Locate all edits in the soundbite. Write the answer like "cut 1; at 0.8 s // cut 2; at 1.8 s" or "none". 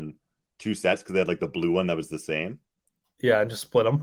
none